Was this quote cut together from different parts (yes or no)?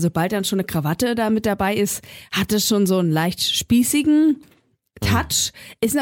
no